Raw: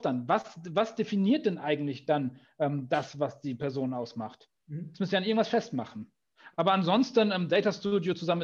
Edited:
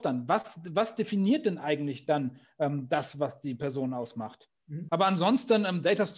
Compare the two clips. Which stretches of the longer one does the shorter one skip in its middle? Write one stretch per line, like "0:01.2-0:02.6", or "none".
0:04.9-0:06.6